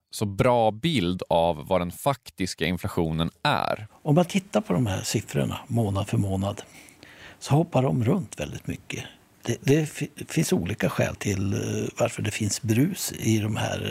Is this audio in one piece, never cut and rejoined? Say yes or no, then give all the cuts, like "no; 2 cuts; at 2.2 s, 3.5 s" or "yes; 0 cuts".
no; 1 cut; at 11.2 s